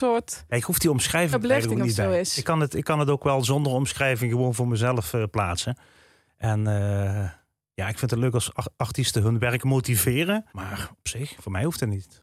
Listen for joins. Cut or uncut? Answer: cut